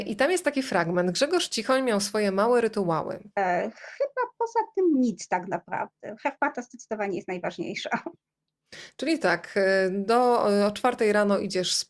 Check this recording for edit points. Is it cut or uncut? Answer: cut